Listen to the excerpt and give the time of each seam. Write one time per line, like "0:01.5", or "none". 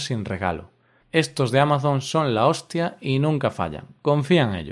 0:01.0